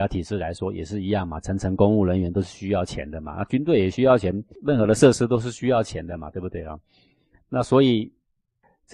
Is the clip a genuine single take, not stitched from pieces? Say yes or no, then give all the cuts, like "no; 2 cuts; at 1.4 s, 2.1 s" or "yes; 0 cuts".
yes; 0 cuts